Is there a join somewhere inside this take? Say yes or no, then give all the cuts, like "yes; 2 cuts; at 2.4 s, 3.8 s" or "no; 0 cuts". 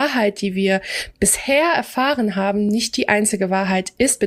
no; 0 cuts